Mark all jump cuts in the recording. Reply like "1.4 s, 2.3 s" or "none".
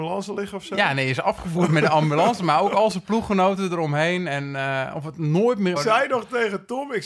5.8 s